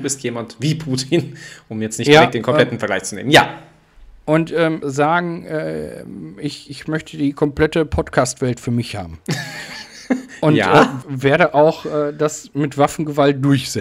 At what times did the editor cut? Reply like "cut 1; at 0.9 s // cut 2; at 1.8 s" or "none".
cut 1; at 4.8 s // cut 2; at 11.0 s